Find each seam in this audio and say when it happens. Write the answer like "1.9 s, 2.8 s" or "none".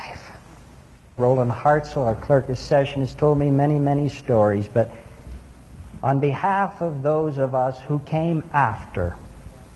1.2 s